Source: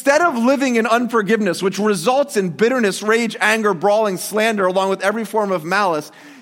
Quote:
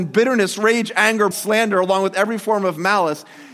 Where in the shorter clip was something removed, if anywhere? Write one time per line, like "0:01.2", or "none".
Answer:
0:01.3